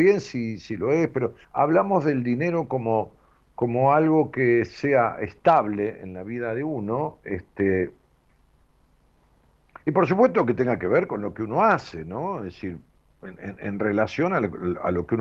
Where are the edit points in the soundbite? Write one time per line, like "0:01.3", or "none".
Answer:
0:01.4
0:09.8